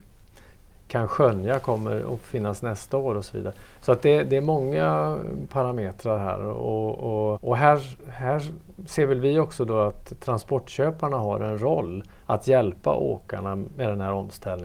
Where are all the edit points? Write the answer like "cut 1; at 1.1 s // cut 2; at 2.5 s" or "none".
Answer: cut 1; at 7.3 s